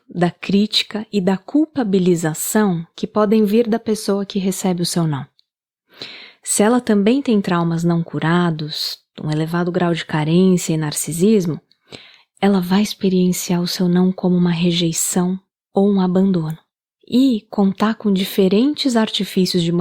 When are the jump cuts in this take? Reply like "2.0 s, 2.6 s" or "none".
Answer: none